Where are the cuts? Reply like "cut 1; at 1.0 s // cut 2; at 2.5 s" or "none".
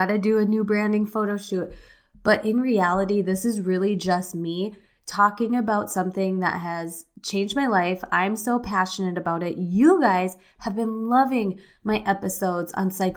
none